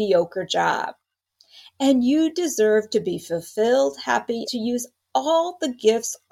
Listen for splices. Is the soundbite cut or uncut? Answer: cut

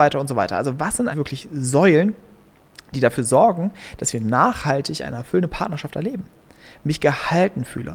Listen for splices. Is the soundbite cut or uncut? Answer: cut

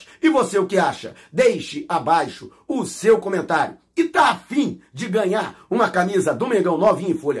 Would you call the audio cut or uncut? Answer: uncut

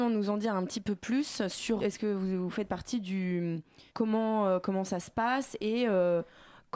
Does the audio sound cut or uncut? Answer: cut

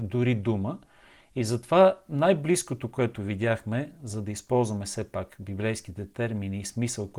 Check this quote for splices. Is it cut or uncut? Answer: uncut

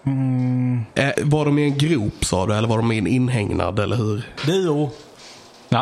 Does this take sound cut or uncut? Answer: cut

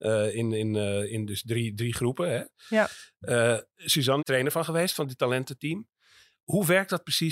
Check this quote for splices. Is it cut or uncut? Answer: cut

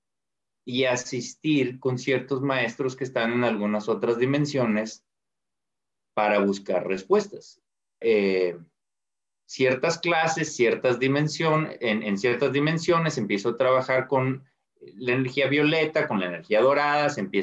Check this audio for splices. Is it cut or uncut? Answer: cut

